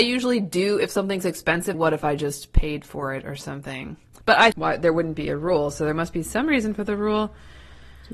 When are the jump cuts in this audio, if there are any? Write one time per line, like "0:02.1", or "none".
0:01.7
0:04.5